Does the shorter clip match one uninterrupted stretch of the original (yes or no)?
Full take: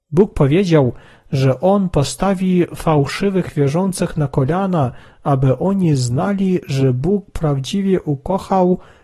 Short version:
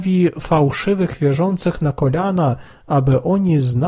yes